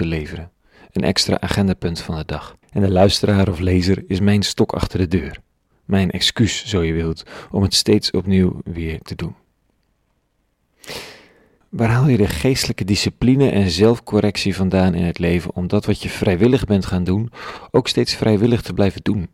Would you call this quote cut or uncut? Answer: cut